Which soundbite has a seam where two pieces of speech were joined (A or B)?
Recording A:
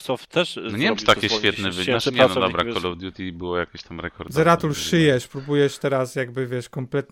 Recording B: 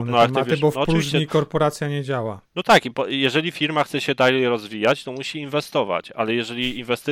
B